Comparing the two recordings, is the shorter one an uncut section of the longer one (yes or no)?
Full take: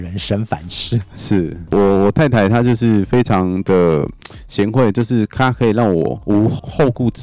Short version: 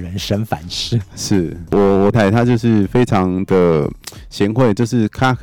no